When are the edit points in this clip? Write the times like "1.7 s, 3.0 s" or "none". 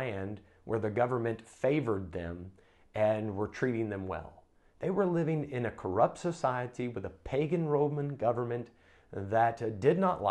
none